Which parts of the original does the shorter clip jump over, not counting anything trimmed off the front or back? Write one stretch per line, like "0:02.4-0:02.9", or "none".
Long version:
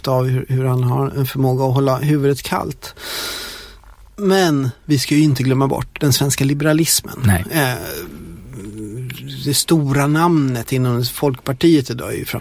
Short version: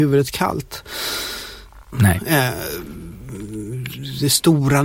0:04.0-0:07.2